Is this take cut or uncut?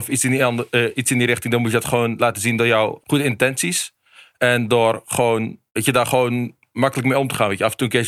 cut